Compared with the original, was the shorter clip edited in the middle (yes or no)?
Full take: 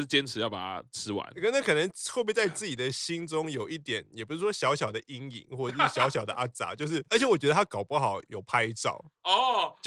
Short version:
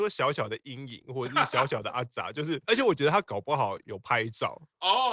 no